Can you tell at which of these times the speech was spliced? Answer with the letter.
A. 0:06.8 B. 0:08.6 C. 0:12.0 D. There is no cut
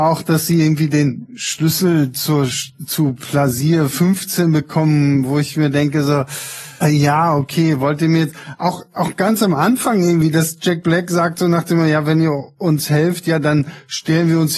A